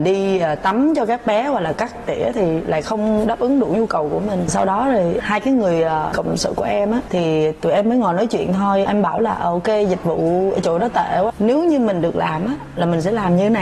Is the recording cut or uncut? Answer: cut